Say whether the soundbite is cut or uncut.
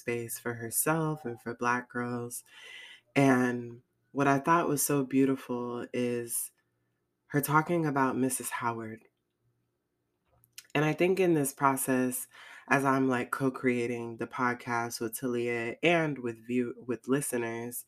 uncut